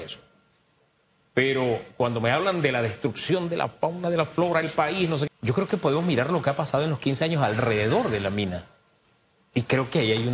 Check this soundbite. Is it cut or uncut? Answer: cut